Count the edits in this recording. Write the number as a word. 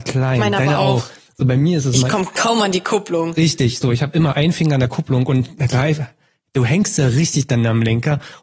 zero